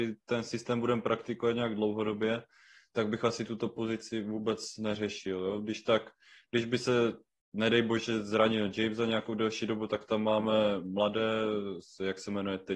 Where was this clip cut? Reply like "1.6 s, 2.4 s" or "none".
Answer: none